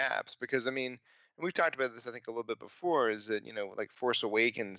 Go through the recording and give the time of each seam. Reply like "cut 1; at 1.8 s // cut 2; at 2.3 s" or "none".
none